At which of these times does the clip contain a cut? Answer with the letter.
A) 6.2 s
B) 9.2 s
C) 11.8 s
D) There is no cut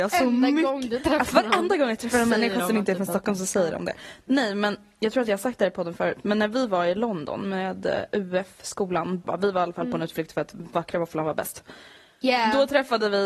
B